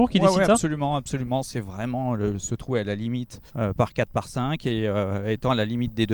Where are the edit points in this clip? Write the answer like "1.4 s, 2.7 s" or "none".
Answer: 3.5 s